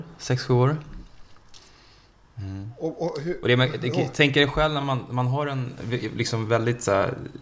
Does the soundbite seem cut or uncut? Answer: uncut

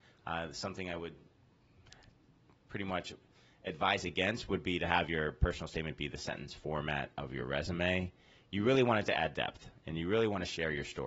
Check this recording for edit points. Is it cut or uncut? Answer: uncut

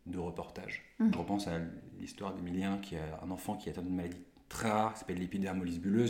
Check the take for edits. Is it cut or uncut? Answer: cut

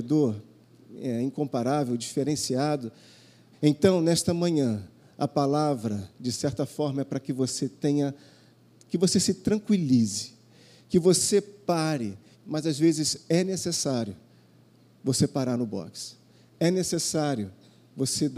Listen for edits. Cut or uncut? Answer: cut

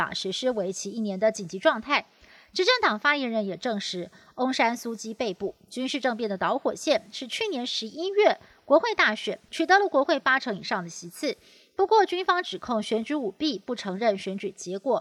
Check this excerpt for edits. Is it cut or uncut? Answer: cut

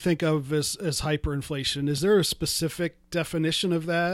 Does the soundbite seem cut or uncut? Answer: uncut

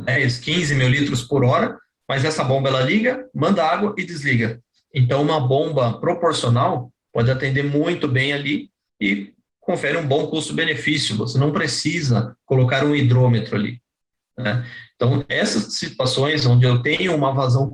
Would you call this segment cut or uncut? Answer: uncut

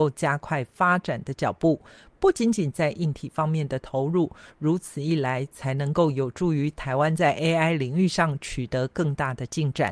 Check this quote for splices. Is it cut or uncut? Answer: uncut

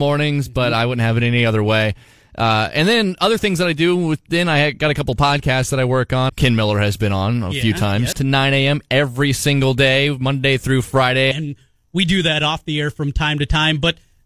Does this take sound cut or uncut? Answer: cut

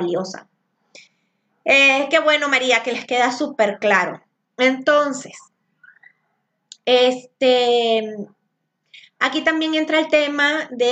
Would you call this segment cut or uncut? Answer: uncut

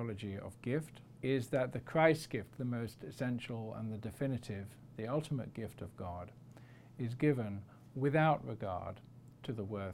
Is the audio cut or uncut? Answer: cut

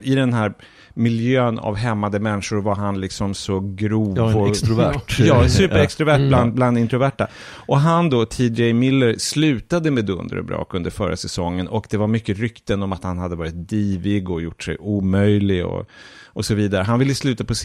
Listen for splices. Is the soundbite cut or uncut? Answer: uncut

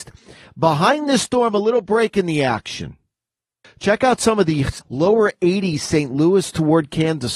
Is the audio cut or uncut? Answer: cut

